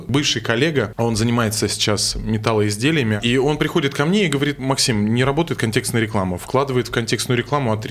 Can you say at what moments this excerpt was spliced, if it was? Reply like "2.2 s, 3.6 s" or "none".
3.2 s